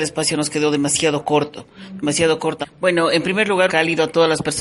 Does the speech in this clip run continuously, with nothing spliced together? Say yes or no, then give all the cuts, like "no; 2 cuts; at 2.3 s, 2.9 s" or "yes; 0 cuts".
no; 2 cuts; at 2.6 s, 3.7 s